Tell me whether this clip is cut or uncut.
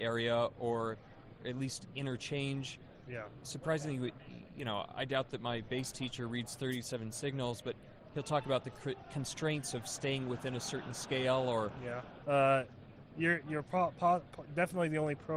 cut